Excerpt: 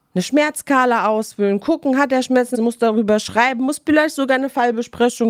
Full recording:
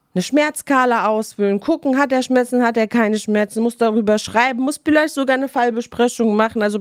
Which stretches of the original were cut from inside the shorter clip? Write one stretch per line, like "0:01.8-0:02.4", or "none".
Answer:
0:02.5-0:03.5